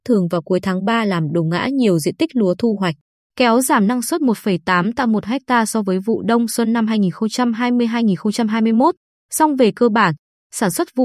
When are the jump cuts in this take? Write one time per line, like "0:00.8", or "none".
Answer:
none